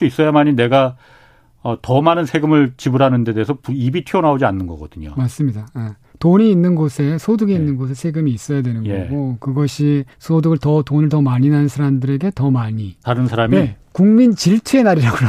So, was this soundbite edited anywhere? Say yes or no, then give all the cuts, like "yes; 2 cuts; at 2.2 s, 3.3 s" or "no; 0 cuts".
yes; 2 cuts; at 10.1 s, 13.0 s